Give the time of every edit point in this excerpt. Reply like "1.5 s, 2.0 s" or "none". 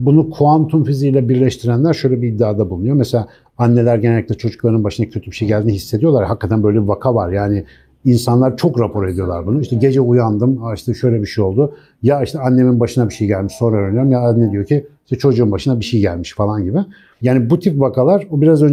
none